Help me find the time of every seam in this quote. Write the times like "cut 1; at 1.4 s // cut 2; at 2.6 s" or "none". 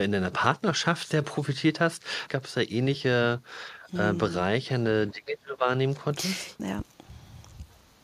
cut 1; at 2.3 s // cut 2; at 6.6 s